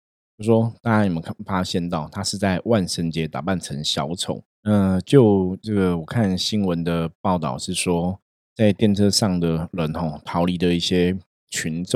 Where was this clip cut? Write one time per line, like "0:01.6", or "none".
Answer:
0:04.5